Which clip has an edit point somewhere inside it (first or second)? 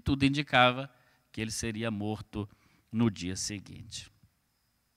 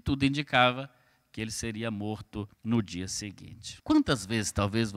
second